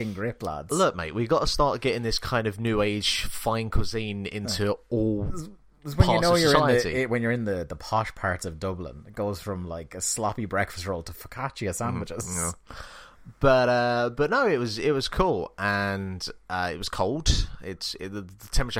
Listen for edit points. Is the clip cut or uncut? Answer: uncut